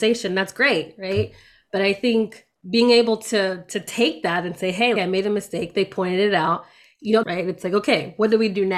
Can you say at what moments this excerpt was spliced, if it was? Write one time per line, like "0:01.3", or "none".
0:05.0
0:07.2